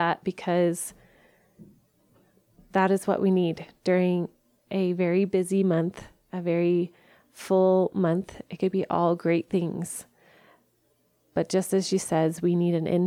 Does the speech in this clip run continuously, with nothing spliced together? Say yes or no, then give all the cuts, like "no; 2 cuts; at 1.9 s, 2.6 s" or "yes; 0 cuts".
yes; 0 cuts